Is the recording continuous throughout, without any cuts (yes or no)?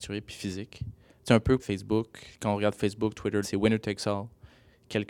no